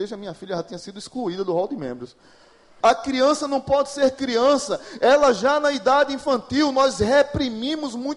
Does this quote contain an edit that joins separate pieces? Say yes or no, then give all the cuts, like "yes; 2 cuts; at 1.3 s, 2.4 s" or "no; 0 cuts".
yes; 1 cut; at 2.8 s